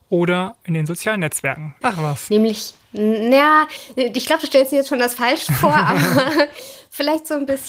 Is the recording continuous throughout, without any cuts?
no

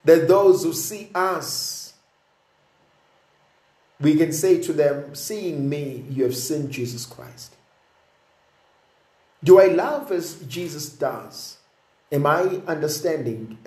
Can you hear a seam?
yes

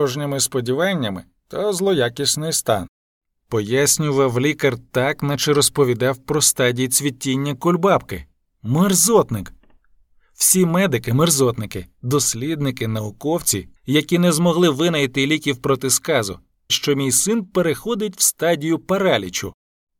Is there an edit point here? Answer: yes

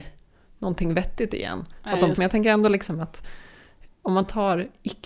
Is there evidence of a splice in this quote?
yes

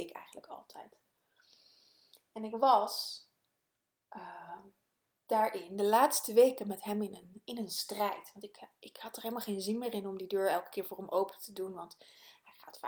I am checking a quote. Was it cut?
no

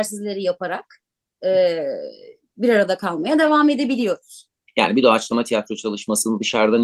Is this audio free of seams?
no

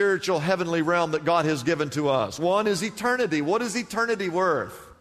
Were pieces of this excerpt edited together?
no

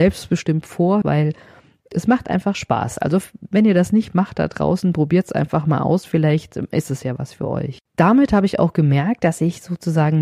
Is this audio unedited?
no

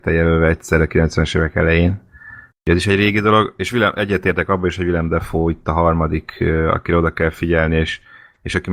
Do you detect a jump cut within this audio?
no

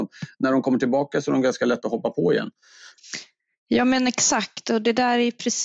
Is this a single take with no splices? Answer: yes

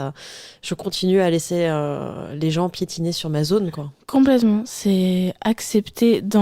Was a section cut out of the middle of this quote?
no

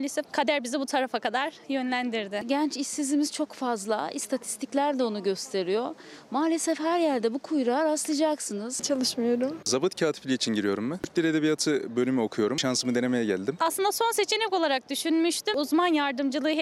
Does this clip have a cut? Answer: yes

